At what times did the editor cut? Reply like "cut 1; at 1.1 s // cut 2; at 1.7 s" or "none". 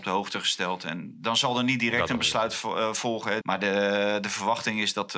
cut 1; at 3.4 s